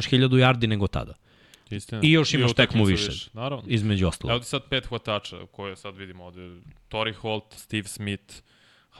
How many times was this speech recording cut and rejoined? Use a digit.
1